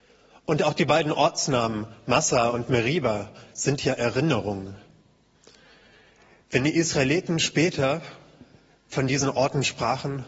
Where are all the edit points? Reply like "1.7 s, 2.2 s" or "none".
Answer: none